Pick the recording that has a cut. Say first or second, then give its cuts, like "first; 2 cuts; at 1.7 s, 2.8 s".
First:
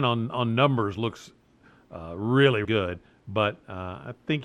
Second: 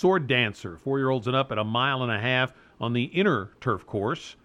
first; 1 cut; at 2.6 s